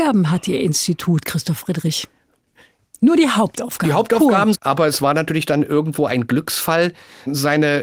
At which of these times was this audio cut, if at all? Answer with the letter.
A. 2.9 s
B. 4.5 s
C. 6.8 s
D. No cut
B